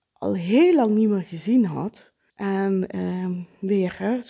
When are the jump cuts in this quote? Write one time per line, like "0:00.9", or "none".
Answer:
0:02.3